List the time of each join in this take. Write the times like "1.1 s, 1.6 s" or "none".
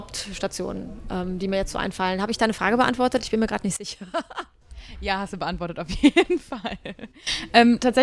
none